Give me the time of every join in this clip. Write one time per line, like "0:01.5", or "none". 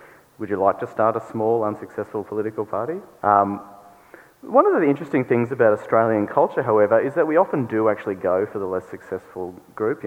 0:03.2